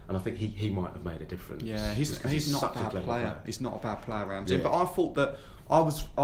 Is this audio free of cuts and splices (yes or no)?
yes